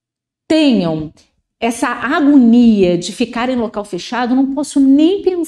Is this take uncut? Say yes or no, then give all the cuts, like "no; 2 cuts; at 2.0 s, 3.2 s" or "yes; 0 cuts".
yes; 0 cuts